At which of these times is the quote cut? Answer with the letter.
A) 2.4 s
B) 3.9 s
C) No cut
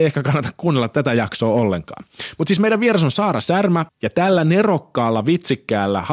B